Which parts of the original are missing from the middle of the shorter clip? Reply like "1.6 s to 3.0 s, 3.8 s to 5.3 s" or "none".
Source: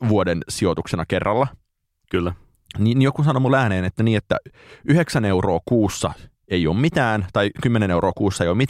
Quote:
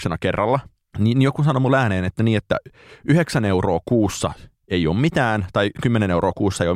1.8 s to 2.7 s